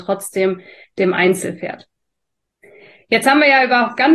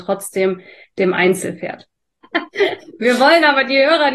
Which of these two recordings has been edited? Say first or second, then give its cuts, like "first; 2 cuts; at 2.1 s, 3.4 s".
second; 1 cut; at 2.2 s